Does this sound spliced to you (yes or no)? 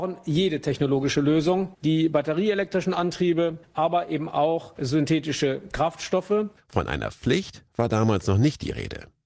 yes